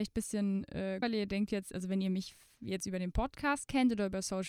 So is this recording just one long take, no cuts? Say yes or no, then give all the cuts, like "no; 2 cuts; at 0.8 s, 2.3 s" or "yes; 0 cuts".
no; 1 cut; at 1.0 s